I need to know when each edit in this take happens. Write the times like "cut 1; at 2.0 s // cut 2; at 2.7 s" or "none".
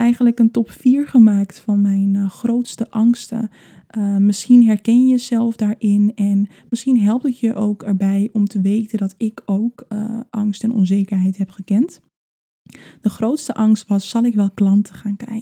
none